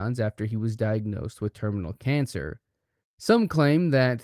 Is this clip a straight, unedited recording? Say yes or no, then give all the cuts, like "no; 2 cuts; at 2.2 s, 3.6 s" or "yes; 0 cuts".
no; 1 cut; at 3.0 s